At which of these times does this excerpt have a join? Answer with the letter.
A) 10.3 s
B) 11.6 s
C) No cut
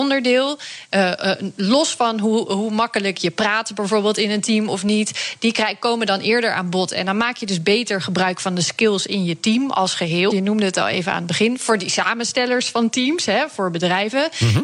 A